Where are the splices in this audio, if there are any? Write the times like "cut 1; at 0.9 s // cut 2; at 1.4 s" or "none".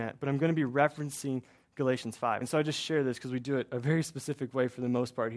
none